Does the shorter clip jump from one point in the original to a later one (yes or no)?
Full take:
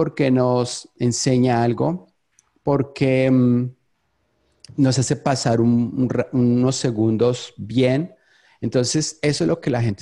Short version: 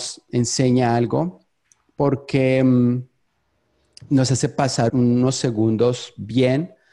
yes